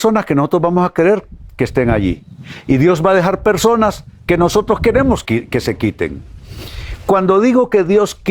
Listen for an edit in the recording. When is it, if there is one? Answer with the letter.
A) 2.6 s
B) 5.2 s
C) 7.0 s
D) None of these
B